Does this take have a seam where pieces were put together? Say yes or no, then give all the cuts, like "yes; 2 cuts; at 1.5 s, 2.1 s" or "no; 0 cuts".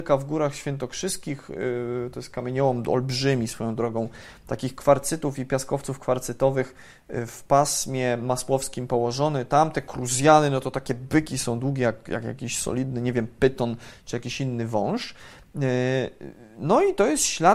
no; 0 cuts